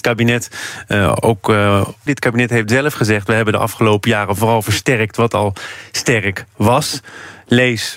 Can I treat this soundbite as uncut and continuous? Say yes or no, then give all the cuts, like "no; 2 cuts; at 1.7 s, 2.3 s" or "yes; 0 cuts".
no; 1 cut; at 2.1 s